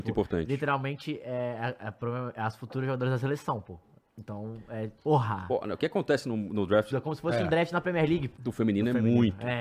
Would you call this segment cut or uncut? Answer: cut